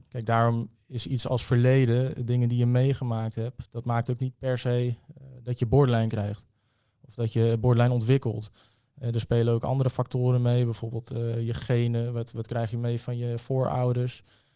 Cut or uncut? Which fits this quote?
uncut